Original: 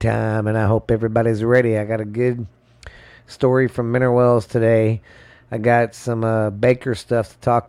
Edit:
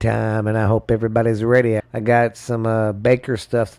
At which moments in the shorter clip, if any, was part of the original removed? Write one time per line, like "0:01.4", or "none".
0:01.8